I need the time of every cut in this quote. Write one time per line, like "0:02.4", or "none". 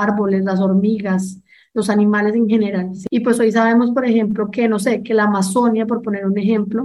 none